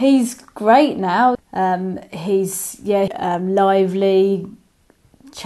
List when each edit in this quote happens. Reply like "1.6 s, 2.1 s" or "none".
1.3 s, 3.1 s